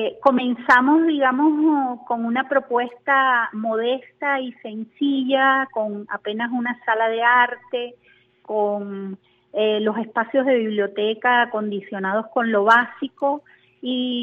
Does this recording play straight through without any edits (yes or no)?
yes